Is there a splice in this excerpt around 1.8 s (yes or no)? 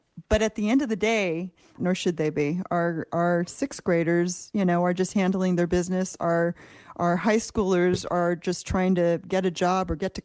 yes